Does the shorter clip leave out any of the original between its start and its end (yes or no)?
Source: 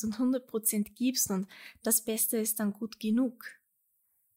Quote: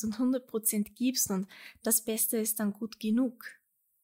no